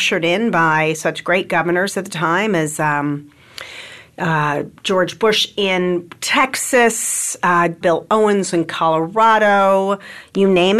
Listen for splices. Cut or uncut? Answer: cut